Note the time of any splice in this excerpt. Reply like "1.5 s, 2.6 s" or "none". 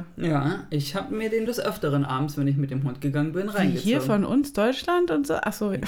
1.5 s